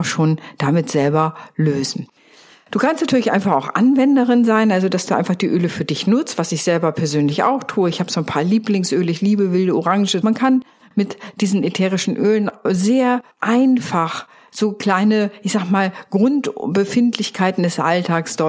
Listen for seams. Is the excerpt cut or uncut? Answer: cut